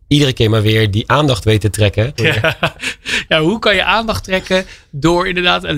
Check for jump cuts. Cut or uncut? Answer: cut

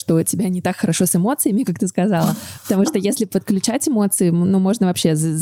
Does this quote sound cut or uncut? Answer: uncut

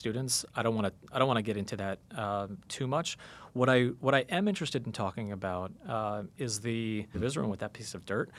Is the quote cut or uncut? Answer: cut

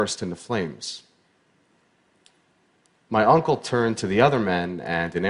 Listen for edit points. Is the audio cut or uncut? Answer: uncut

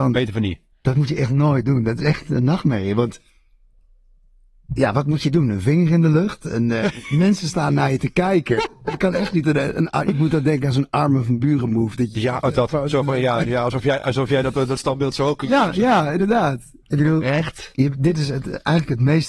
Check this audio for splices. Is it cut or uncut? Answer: uncut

